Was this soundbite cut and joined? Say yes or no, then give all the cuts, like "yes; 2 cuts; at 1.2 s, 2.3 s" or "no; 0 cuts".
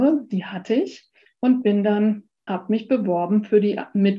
yes; 1 cut; at 2.5 s